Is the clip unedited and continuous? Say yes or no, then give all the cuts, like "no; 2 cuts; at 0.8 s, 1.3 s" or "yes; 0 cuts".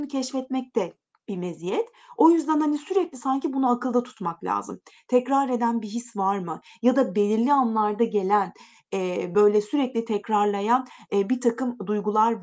yes; 0 cuts